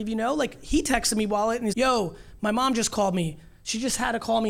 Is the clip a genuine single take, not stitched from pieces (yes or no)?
no